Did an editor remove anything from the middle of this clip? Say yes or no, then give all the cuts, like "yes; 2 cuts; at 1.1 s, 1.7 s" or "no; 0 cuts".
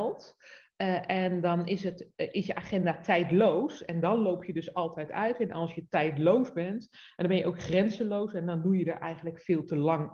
no; 0 cuts